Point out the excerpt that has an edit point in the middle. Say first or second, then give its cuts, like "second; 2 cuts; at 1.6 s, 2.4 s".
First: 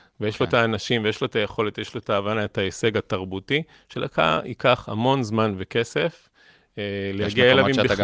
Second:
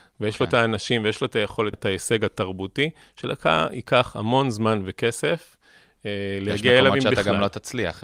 second; 1 cut; at 1.7 s